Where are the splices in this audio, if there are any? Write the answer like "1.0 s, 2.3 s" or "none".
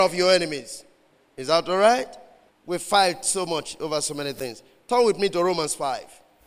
2.5 s